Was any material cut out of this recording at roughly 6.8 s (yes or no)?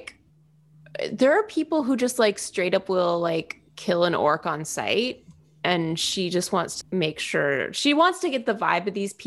yes